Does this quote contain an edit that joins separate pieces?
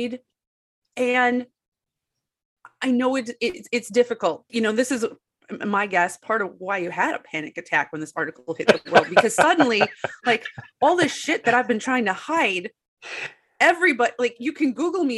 yes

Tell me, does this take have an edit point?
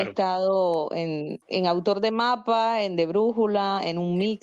yes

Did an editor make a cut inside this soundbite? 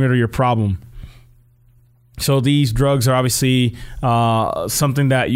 no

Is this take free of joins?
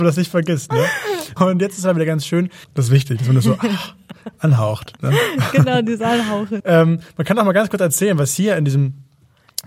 no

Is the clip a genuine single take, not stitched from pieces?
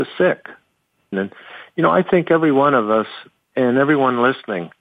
no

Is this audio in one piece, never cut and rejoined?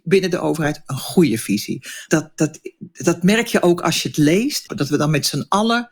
no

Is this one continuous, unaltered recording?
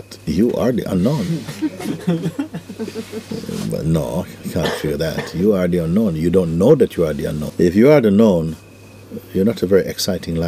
no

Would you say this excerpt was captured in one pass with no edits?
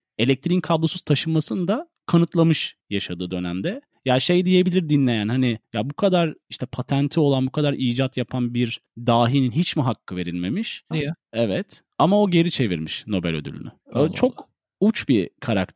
no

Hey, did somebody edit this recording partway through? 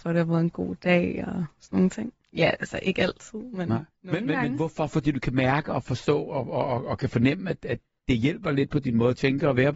yes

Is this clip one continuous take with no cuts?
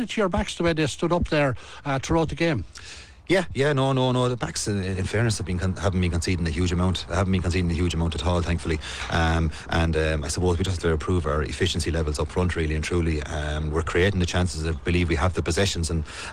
yes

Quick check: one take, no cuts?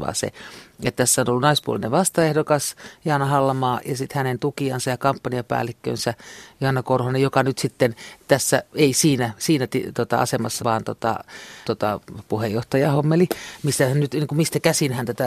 no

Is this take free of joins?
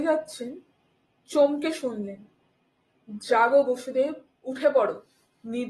no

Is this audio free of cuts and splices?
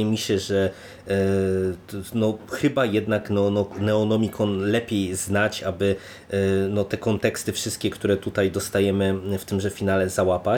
yes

